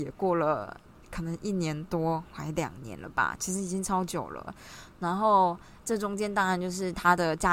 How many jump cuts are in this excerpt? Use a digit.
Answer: 0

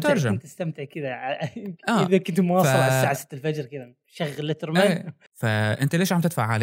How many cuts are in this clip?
1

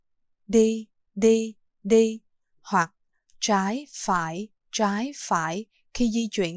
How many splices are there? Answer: 1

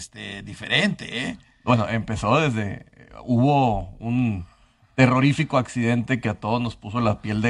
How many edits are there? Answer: 0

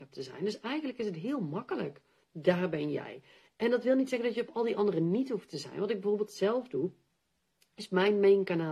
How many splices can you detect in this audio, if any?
1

